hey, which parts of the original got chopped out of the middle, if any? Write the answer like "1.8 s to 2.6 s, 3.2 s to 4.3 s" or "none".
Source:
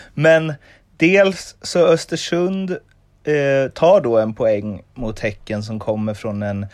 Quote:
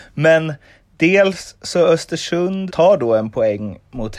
2.7 s to 3.7 s